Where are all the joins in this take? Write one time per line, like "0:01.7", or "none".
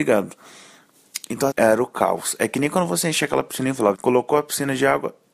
0:01.5
0:03.9